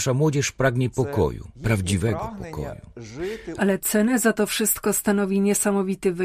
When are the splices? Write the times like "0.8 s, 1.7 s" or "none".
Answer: 1.5 s, 3.6 s